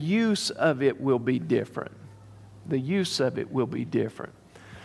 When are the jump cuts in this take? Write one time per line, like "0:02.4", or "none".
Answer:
none

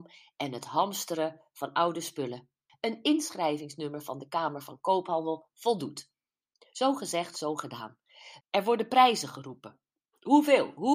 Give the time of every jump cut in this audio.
0:02.7
0:08.4

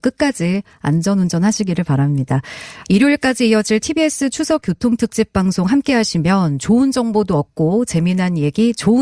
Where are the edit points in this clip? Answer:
0:02.8

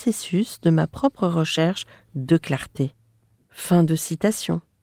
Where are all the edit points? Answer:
0:03.3

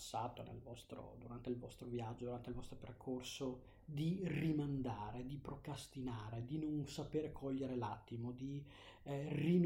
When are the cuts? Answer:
none

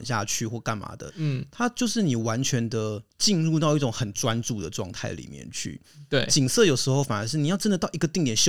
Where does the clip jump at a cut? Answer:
0:01.1
0:03.1

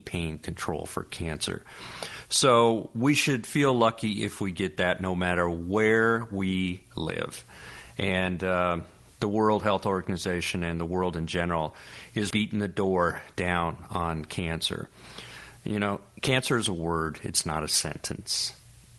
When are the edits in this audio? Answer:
0:12.3

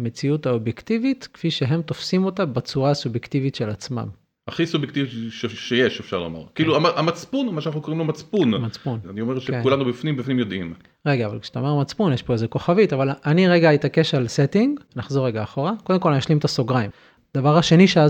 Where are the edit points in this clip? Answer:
0:09.0
0:14.9

